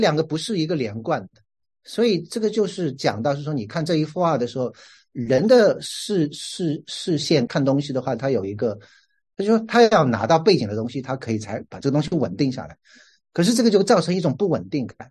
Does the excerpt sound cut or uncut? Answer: cut